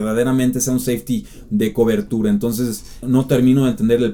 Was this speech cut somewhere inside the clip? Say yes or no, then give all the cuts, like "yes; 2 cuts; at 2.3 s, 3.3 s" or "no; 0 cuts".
yes; 1 cut; at 3.0 s